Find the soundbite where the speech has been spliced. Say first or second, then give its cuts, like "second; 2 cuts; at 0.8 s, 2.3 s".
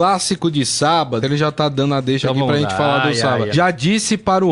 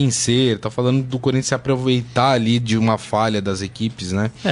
first; 2 cuts; at 1.2 s, 3.5 s